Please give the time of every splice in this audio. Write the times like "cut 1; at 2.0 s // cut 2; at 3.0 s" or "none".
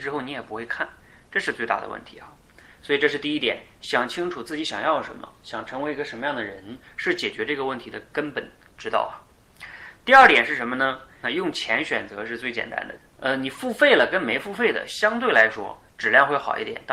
cut 1; at 11.2 s // cut 2; at 13.0 s